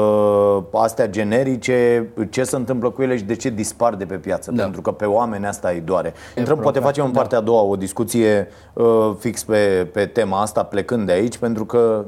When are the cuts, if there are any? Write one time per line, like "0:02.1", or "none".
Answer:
0:06.4